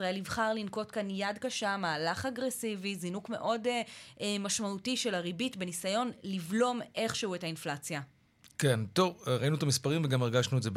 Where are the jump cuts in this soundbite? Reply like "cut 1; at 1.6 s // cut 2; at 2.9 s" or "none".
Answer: none